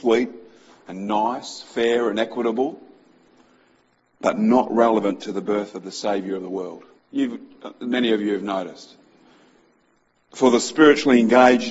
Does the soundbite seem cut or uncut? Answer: cut